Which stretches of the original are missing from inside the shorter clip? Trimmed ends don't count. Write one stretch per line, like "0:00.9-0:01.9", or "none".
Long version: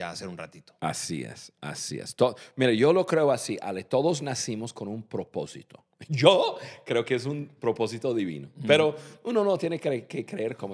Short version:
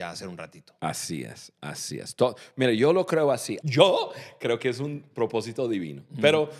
0:03.6-0:06.1